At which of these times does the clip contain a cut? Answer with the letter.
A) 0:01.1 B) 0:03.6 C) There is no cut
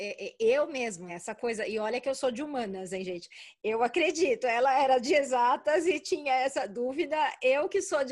A